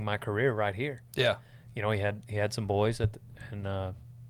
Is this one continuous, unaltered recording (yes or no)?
yes